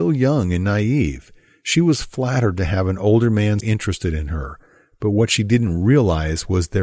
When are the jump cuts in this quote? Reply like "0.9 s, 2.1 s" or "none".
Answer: 3.6 s